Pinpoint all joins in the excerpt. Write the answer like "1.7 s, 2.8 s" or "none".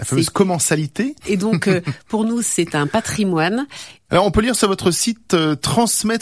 1.2 s, 4.1 s